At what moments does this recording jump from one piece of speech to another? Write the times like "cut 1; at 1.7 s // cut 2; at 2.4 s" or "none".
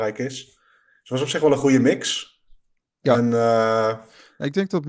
none